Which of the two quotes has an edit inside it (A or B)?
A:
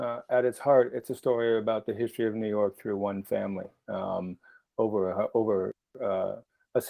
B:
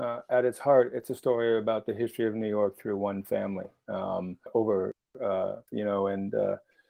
B